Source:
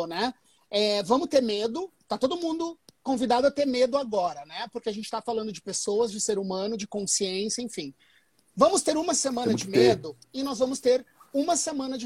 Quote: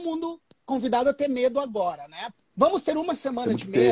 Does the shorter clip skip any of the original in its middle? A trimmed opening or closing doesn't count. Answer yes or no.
yes